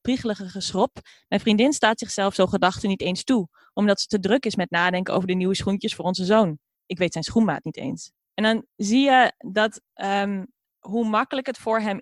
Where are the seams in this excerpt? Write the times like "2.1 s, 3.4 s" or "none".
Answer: none